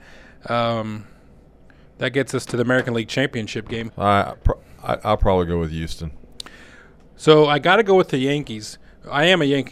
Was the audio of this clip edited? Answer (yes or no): yes